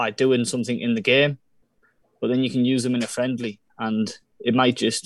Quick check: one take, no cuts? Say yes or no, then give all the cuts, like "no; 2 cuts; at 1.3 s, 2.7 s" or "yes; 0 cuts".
yes; 0 cuts